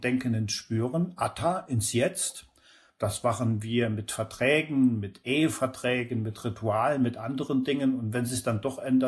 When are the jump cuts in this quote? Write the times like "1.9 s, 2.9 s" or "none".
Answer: 2.9 s